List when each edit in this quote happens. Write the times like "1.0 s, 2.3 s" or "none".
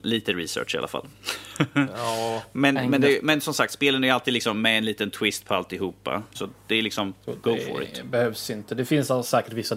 6.3 s